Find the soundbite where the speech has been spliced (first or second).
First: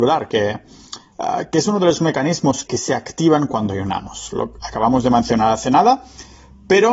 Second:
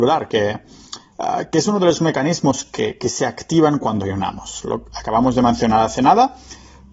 first